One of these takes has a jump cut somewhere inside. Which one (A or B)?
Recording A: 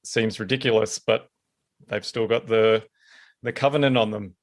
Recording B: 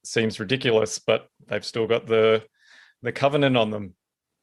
B